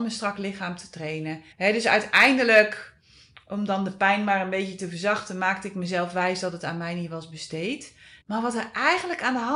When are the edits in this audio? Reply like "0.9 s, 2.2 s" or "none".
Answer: 1.5 s, 8.2 s

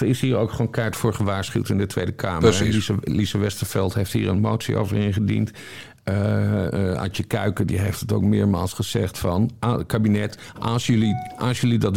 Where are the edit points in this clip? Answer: none

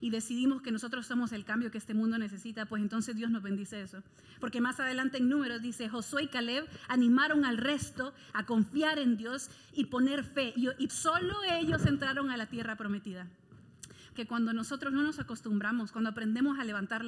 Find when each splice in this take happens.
10.9 s, 14.2 s

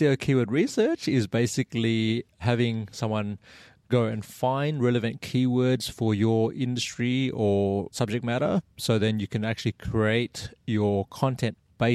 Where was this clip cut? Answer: 8.7 s

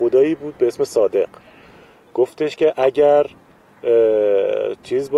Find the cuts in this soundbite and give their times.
none

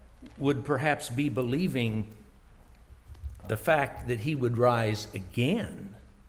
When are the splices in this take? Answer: 3.4 s

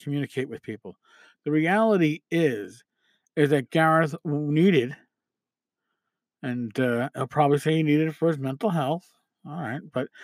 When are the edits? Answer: none

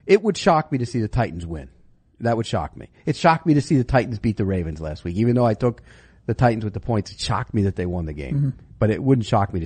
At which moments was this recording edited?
none

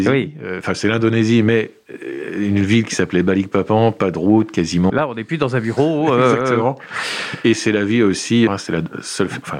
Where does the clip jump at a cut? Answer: 4.9 s, 8.5 s

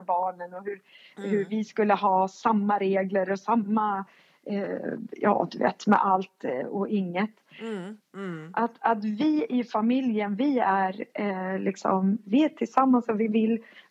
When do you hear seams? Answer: 8.0 s

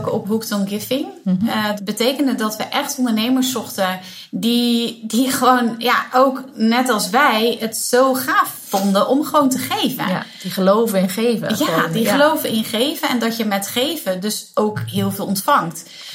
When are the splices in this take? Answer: 1.8 s

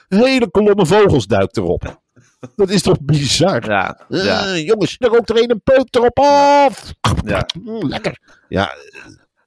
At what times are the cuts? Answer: 5.0 s

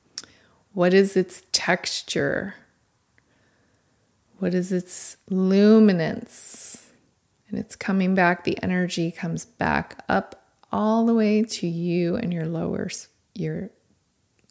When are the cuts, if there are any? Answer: none

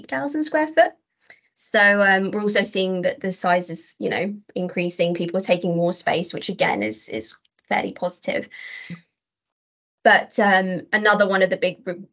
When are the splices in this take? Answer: none

